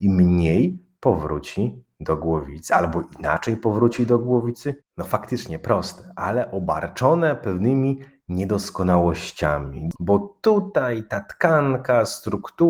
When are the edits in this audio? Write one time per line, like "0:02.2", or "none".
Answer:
0:04.8
0:09.9

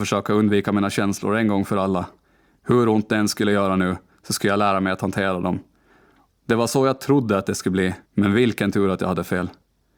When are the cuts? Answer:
0:06.3
0:08.0

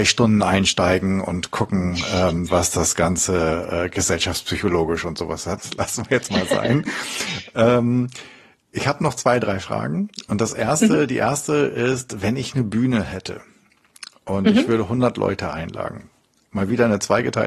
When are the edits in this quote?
0:05.6

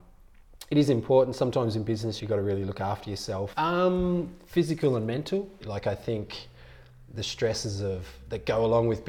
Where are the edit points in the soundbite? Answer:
0:02.2
0:03.5
0:05.6

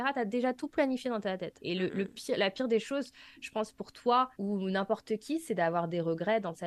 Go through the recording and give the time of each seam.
0:01.6
0:04.3

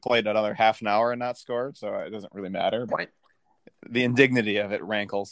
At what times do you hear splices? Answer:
0:02.9

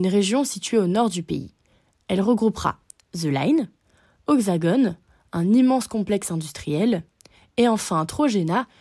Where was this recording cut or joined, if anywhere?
none

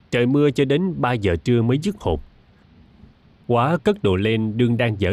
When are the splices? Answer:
none

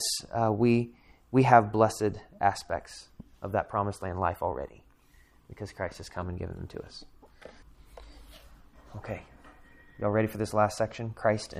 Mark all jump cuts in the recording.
0:07.6

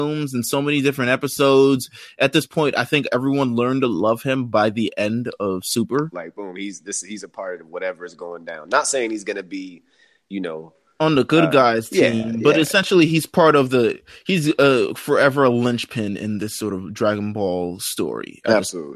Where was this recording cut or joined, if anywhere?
0:06.1

